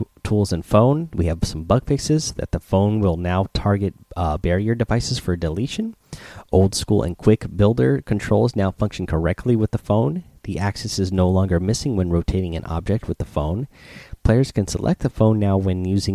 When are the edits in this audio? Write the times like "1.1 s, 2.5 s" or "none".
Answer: none